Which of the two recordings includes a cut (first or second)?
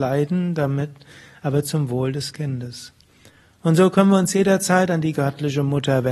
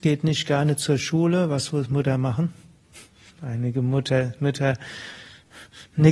second